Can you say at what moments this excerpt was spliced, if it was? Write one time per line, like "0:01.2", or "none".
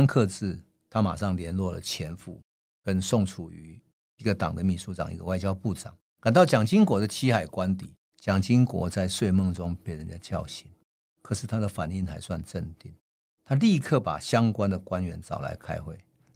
0:08.0